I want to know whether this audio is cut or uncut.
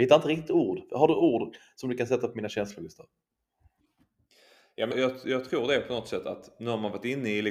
cut